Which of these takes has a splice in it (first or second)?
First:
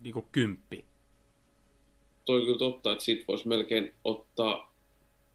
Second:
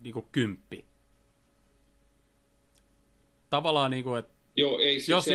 first